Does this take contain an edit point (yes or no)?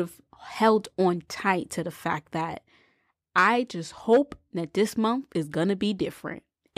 no